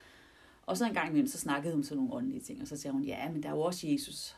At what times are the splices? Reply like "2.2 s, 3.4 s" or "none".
none